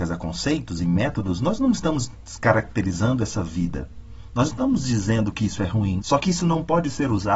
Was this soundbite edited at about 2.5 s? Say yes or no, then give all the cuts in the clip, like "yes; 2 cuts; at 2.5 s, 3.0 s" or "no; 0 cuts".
no; 2 cuts; at 4.3 s, 6.0 s